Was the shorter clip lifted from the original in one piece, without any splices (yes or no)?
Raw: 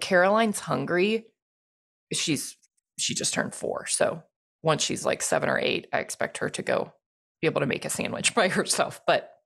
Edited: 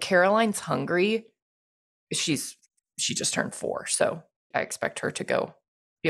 no